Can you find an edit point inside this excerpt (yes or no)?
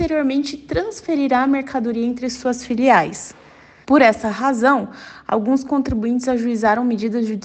yes